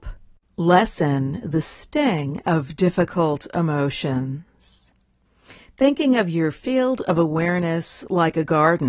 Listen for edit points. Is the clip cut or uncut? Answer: uncut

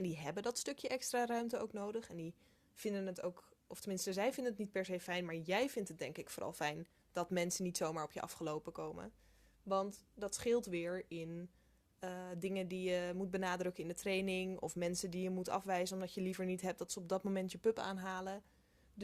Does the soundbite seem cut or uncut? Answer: uncut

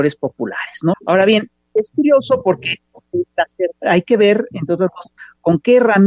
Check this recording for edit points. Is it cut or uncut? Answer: cut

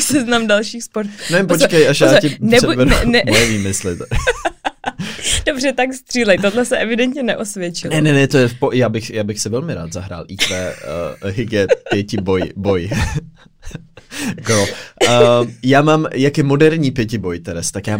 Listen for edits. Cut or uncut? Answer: uncut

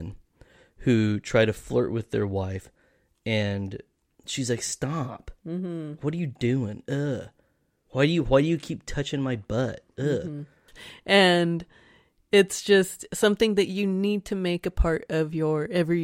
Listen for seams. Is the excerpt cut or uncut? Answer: cut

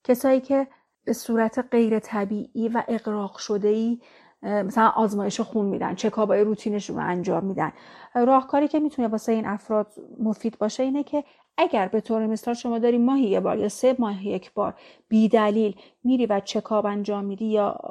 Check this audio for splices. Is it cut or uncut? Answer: uncut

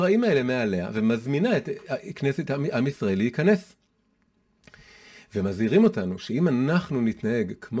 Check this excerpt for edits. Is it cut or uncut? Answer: uncut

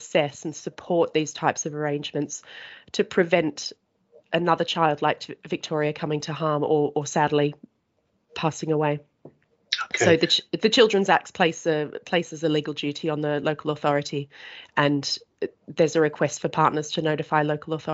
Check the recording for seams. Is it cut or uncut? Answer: uncut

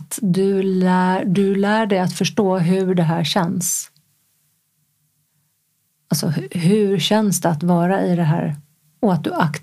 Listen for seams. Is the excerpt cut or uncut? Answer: uncut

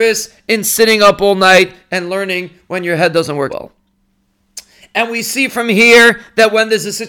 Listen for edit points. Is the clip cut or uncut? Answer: cut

